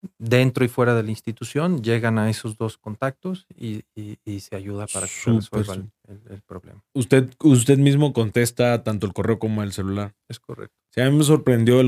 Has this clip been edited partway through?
no; 0 cuts

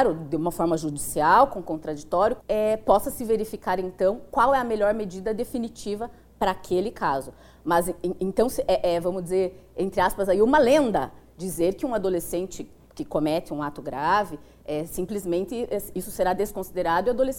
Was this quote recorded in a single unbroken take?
no; 1 cut; at 2.4 s

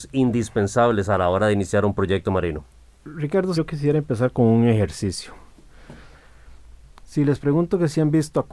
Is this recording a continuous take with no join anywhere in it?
no; 2 cuts; at 3.5 s, 7.0 s

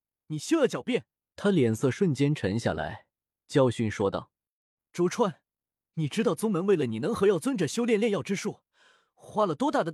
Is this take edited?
yes; 1 cut; at 1.2 s

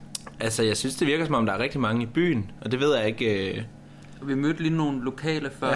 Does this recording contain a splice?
no; 0 cuts

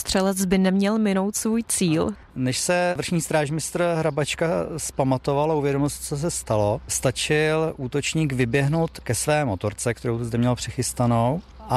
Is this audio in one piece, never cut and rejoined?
yes; 0 cuts

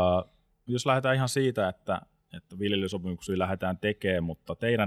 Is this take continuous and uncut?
yes; 0 cuts

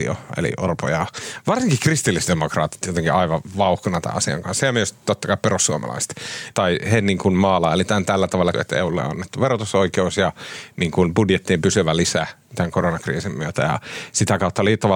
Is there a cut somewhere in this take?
yes; 2 cuts; at 6.5 s, 8.5 s

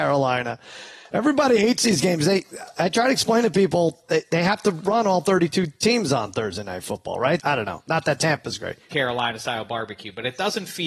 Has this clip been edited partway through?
yes; 2 cuts; at 7.4 s, 8.9 s

